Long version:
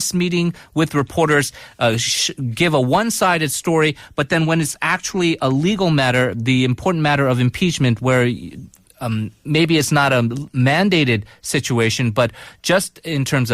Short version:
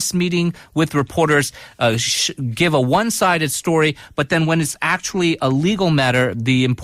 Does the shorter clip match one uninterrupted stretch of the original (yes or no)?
yes